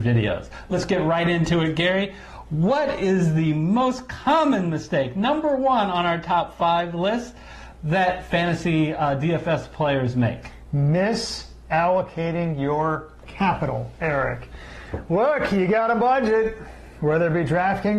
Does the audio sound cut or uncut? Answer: uncut